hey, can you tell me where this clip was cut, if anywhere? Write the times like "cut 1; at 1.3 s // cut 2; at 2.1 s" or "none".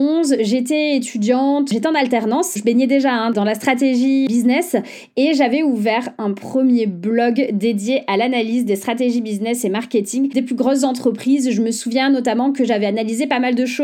cut 1; at 2.6 s